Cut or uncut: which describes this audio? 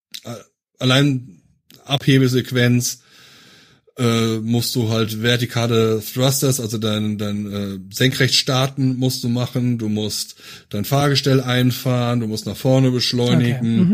uncut